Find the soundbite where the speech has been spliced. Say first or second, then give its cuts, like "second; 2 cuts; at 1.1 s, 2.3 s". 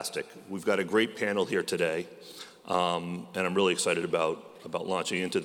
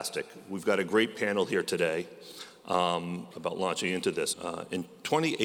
second; 2 cuts; at 3.3 s, 4.3 s